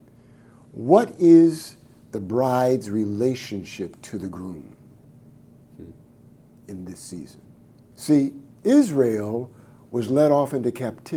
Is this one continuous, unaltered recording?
no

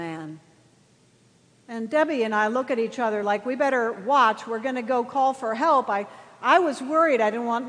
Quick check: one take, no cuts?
yes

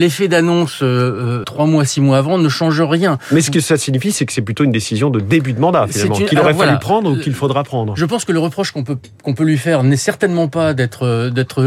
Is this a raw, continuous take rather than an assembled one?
no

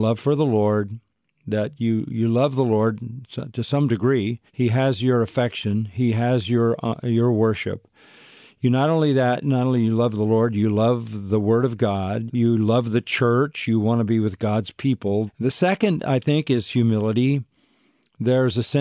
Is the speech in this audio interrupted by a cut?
yes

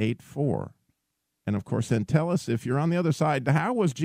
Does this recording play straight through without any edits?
no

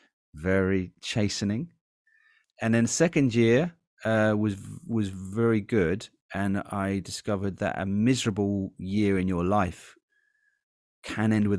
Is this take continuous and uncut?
no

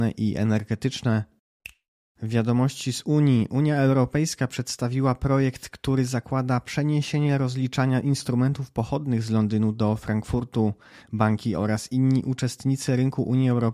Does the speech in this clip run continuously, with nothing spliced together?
yes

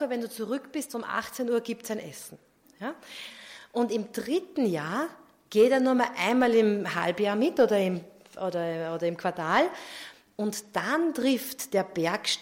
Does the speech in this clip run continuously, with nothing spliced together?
yes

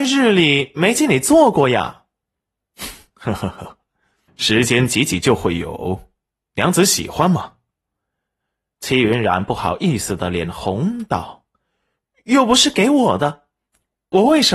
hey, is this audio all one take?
yes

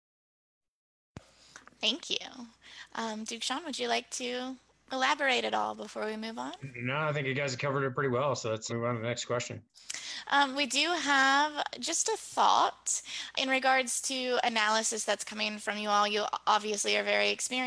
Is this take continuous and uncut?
no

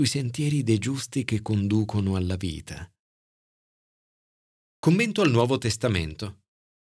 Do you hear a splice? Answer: no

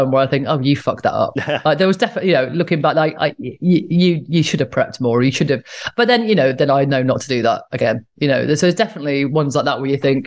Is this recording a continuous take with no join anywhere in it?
yes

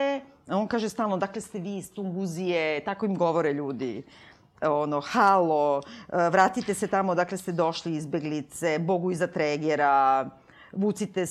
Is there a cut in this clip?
no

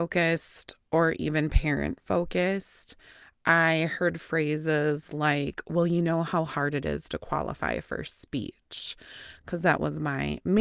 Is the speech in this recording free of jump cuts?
yes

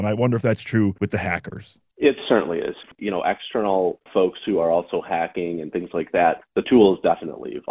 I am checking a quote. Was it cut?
no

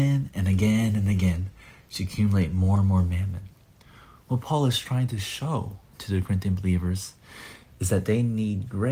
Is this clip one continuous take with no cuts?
yes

